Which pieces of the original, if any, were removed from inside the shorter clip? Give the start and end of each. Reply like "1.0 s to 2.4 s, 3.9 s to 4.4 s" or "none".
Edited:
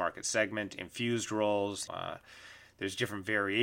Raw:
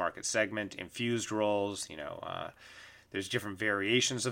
1.9 s to 2.2 s